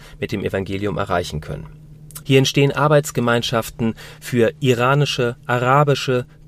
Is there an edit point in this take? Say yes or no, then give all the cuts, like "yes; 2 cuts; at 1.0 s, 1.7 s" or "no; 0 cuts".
yes; 1 cut; at 2.2 s